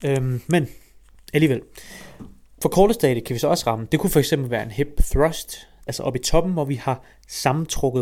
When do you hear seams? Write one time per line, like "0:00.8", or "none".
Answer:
0:05.9